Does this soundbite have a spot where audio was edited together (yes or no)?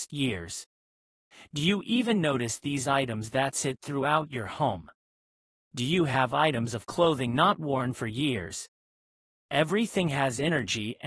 no